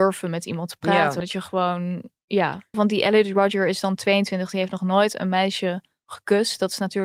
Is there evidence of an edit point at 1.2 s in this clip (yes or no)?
yes